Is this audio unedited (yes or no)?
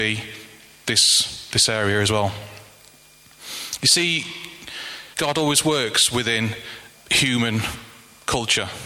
no